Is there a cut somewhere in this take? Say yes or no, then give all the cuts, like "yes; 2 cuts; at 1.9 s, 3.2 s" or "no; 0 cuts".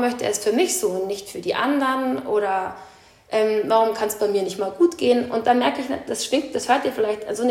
no; 0 cuts